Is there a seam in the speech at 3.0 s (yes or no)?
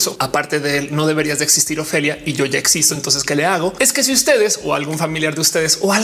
no